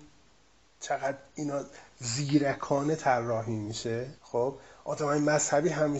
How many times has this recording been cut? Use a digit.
1